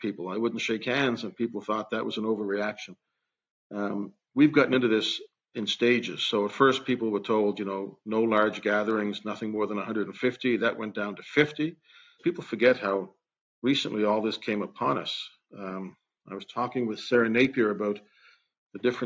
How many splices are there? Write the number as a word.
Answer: one